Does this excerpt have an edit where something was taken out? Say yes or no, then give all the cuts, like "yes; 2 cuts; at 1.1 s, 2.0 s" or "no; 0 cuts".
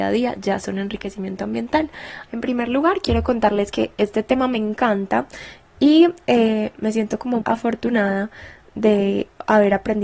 yes; 2 cuts; at 2.3 s, 7.4 s